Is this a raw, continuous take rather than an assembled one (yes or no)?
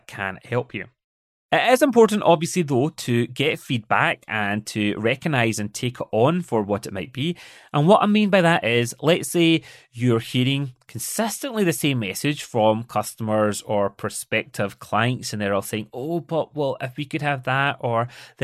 yes